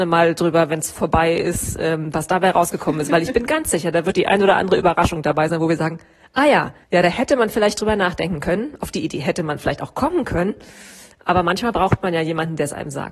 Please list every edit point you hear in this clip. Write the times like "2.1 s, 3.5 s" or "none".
6.8 s